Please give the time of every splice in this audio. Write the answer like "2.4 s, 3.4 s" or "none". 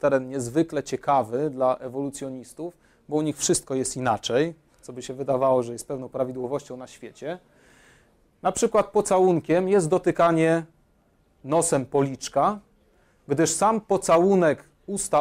none